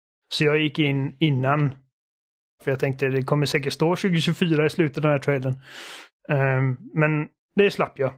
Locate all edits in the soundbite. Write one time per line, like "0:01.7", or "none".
0:02.6